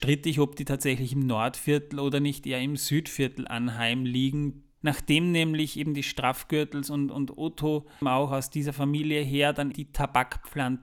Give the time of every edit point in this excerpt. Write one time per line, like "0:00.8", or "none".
0:04.8
0:08.0
0:09.7